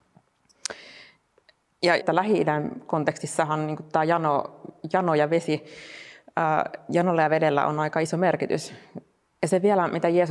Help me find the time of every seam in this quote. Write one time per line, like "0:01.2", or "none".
0:02.0
0:09.2